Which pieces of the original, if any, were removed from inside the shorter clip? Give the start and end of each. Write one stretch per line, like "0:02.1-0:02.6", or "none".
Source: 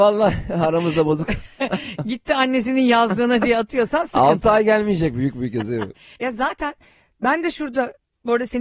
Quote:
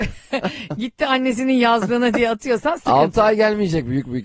none